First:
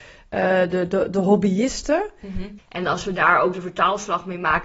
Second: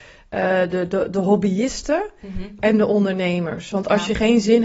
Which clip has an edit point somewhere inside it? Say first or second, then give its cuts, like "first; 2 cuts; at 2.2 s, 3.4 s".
first; 1 cut; at 2.6 s